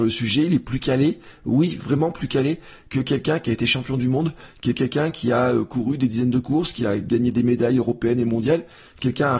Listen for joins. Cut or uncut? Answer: uncut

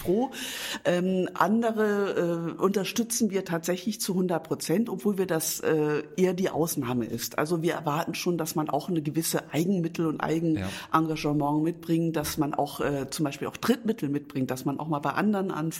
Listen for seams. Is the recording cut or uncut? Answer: uncut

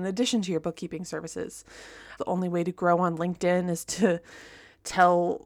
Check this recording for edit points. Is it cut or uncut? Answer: cut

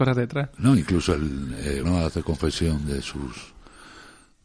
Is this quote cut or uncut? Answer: cut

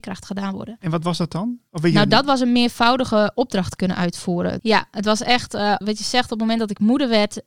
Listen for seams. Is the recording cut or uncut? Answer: cut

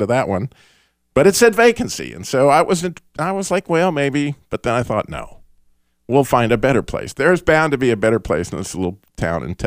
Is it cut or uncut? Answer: uncut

